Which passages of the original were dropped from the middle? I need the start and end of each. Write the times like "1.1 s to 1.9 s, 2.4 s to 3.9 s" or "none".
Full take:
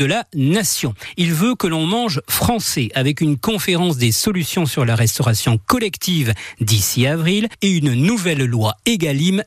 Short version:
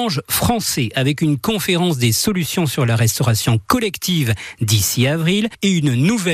none